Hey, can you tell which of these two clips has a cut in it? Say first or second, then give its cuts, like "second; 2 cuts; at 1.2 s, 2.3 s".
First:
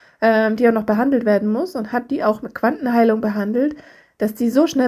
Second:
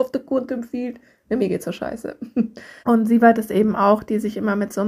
second; 1 cut; at 2.8 s